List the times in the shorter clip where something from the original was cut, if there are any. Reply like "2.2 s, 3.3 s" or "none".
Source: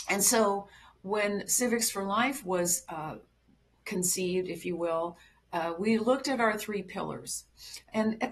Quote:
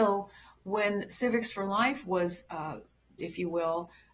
3.2 s